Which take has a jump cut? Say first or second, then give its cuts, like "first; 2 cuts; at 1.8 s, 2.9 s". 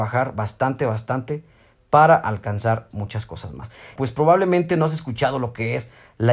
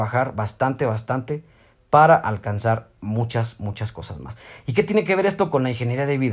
first; 2 cuts; at 2.9 s, 4.0 s